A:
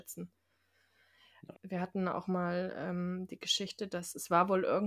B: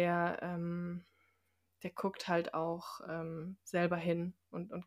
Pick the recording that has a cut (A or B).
A